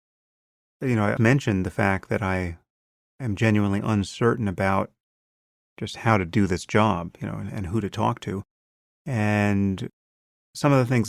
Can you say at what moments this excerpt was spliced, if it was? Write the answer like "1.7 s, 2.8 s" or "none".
1.2 s